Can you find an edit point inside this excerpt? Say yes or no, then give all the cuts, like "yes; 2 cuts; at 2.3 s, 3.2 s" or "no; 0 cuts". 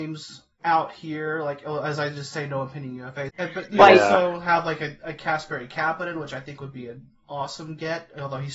yes; 1 cut; at 3.3 s